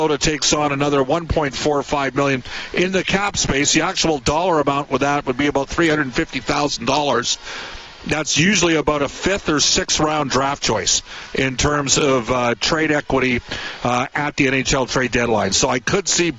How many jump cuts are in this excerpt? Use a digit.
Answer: 0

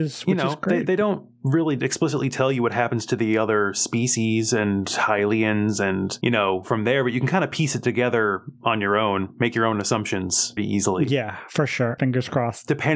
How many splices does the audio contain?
2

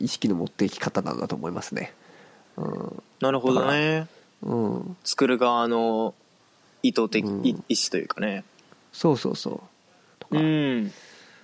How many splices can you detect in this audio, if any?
1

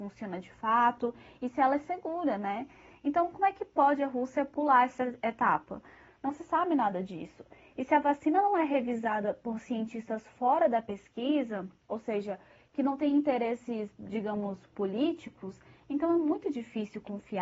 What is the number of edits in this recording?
1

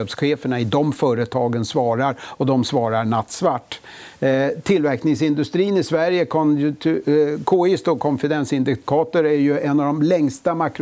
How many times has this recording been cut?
0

